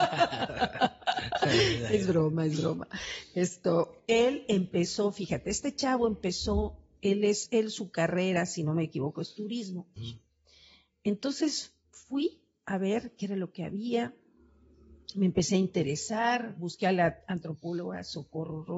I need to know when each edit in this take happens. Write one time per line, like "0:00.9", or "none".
0:10.0